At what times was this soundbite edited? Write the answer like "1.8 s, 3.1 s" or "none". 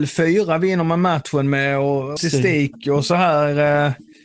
2.2 s